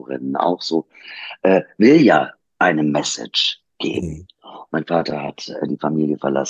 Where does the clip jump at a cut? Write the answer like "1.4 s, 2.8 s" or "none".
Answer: 4.7 s